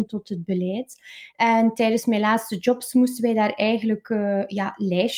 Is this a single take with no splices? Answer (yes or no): no